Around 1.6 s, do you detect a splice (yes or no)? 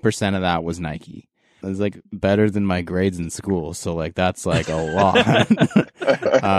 yes